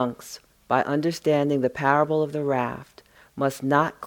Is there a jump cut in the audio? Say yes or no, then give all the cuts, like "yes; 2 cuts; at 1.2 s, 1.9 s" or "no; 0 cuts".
no; 0 cuts